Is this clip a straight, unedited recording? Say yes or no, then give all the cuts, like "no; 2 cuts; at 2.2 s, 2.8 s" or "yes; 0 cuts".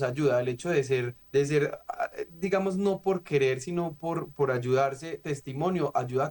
no; 1 cut; at 1.2 s